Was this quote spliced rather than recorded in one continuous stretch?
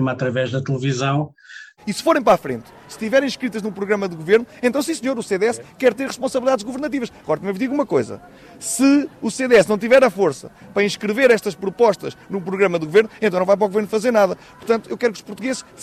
yes; 1 cut; at 1.8 s

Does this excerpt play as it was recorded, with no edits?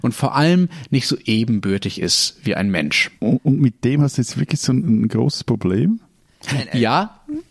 no; 1 cut; at 3.2 s

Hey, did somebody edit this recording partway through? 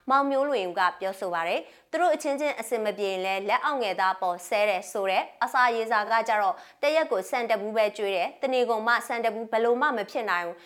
no; 0 cuts

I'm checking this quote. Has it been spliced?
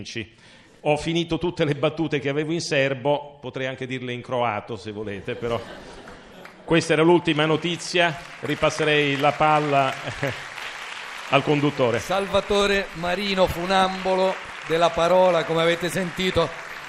no; 0 cuts

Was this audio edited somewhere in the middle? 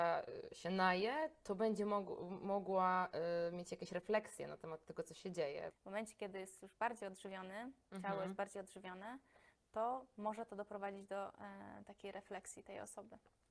yes; 1 cut; at 5.7 s

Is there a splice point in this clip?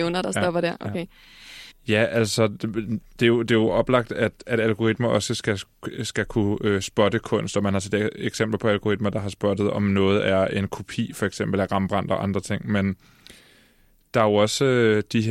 yes; 1 cut; at 1.7 s

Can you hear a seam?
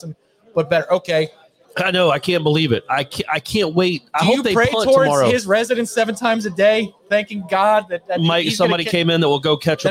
yes; 1 cut; at 1.6 s

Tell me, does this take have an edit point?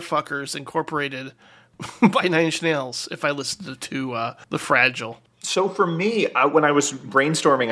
yes; 1 cut; at 4.4 s

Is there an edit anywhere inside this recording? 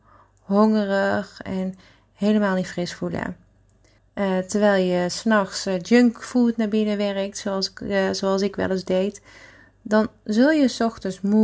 yes; 1 cut; at 4.0 s

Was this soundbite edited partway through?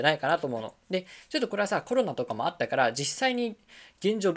no; 0 cuts

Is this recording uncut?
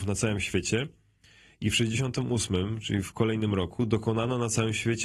yes; 0 cuts

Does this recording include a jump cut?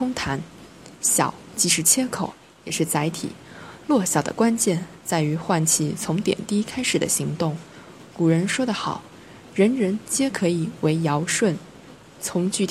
no; 0 cuts

